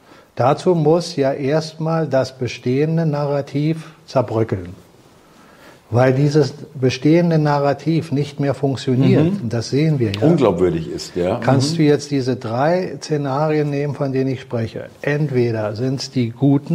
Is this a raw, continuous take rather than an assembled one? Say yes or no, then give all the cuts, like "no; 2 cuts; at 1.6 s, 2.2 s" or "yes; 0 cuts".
yes; 0 cuts